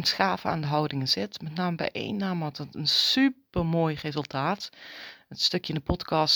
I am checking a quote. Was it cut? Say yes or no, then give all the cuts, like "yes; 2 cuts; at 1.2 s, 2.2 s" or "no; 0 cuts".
no; 0 cuts